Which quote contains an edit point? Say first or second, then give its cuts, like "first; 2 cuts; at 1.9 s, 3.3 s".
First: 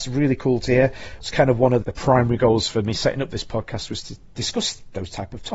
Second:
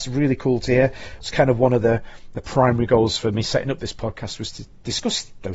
first; 1 cut; at 1.8 s